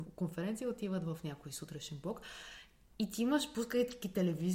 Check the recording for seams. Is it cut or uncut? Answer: uncut